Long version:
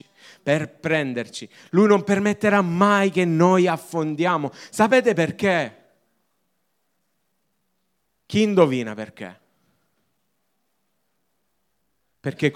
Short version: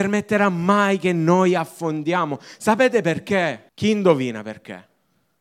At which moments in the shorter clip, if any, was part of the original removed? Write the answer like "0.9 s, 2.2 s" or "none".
3.7 s